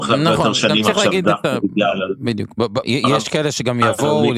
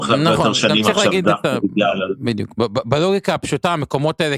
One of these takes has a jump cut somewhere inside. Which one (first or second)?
first